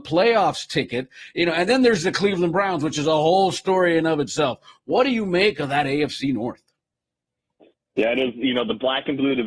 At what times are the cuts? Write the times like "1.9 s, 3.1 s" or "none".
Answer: none